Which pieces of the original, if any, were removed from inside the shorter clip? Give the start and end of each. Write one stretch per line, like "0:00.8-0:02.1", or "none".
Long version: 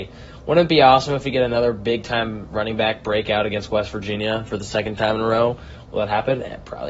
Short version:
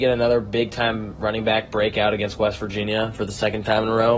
none